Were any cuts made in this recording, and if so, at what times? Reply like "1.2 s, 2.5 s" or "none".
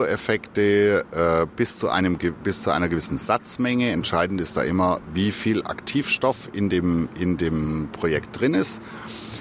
none

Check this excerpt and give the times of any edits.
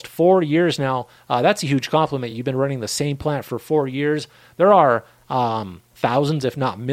none

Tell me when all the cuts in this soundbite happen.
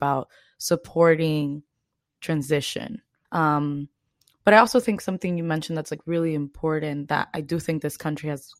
3.2 s

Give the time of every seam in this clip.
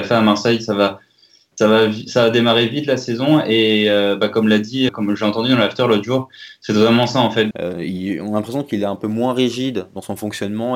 4.9 s, 7.5 s

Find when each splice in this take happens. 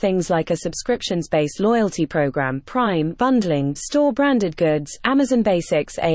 3.7 s

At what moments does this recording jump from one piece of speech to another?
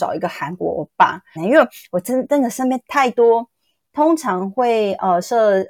1.4 s, 3.8 s

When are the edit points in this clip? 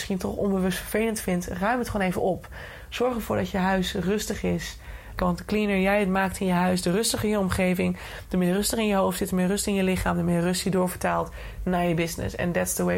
5.2 s

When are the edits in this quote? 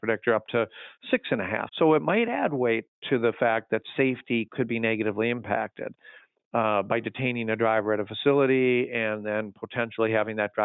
1.7 s

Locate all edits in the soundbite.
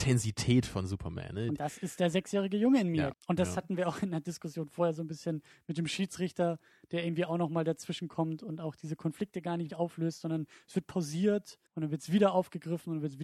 3.1 s, 9.7 s, 11.7 s

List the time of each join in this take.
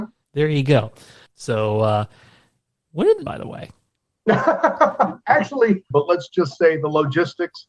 1.3 s, 3.3 s, 5.9 s

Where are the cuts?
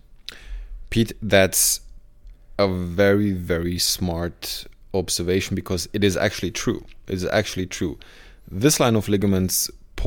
none

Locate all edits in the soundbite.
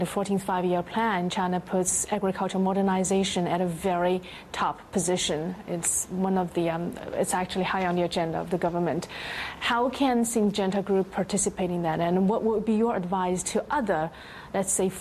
none

